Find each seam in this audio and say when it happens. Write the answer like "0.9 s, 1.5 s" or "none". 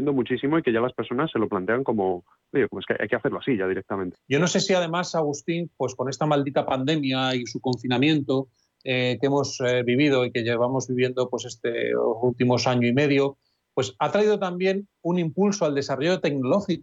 4.1 s